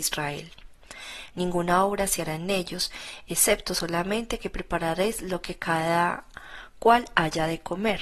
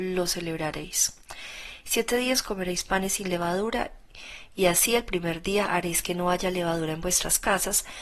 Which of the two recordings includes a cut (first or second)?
first